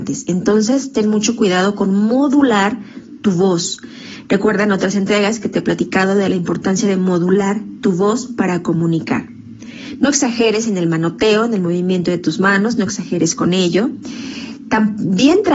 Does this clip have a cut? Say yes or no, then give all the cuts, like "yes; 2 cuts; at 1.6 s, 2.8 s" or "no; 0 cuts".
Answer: no; 0 cuts